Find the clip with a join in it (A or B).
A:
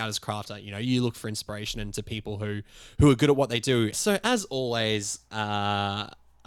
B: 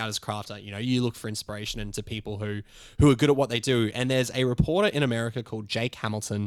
A